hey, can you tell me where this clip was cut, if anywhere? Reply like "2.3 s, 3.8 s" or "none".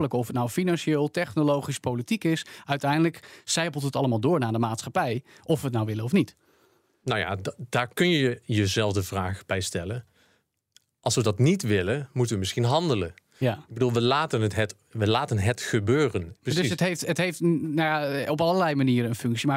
16.4 s